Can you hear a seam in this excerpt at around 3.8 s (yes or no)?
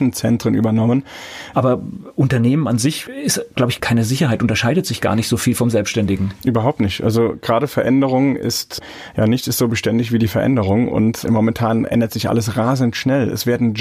no